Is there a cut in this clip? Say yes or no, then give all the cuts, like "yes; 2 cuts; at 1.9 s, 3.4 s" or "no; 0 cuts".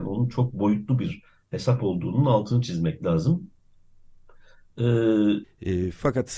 yes; 1 cut; at 5.4 s